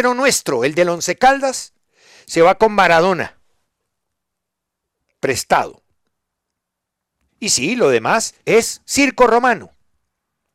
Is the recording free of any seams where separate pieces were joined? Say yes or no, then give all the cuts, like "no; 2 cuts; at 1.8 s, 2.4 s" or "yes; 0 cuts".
no; 2 cuts; at 7.3 s, 8.4 s